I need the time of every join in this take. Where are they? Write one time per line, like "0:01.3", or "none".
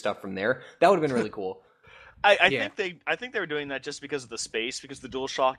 none